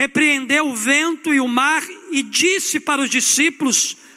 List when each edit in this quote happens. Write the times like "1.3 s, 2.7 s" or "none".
none